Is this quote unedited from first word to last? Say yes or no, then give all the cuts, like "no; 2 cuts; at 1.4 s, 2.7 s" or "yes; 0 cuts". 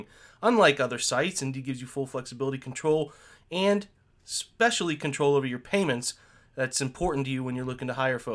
yes; 0 cuts